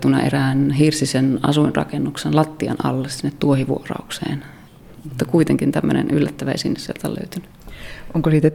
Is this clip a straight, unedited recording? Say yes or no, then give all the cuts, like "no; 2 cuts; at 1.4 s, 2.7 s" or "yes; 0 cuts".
no; 1 cut; at 4.7 s